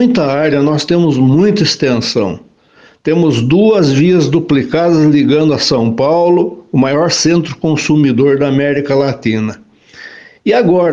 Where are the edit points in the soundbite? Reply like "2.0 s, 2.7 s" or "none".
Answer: none

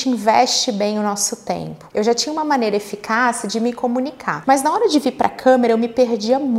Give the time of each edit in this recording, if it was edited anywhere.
1.9 s, 4.4 s

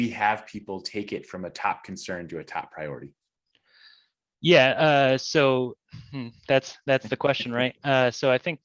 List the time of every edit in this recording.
none

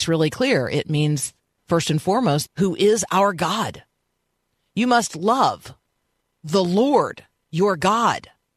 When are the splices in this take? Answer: 2.5 s

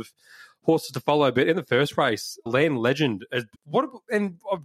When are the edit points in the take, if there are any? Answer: 2.5 s, 3.6 s

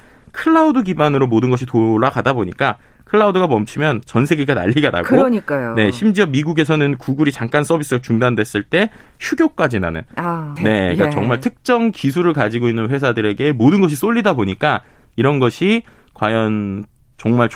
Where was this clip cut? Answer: 10.6 s

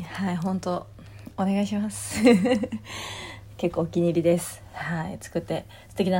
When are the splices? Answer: none

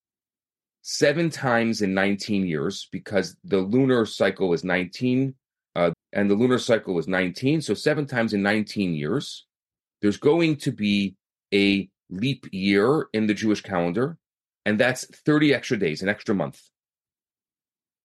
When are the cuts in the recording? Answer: 5.9 s

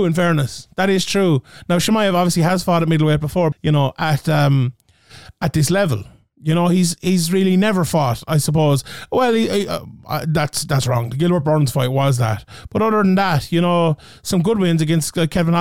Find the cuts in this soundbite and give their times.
3.5 s

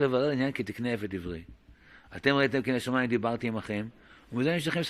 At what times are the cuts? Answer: none

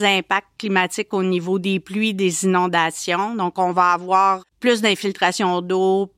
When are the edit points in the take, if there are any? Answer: 4.5 s

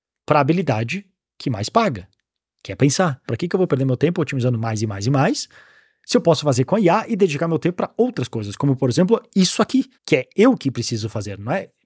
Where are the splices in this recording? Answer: 3.3 s, 9.9 s

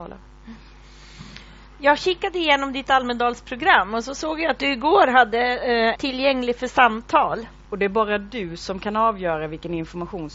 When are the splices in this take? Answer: 6.0 s, 7.6 s

